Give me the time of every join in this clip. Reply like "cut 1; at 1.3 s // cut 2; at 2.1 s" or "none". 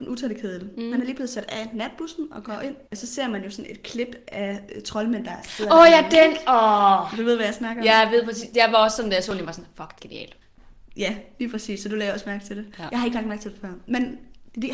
cut 1; at 2.9 s // cut 2; at 10.0 s